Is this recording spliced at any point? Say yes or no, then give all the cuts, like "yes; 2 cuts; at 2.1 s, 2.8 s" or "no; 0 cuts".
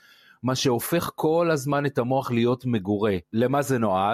yes; 1 cut; at 3.2 s